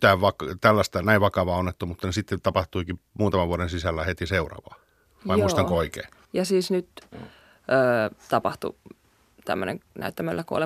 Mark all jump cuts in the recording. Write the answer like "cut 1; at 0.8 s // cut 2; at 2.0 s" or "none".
cut 1; at 7.1 s